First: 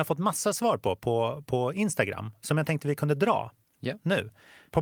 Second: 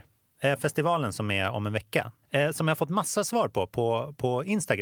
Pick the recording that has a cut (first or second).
second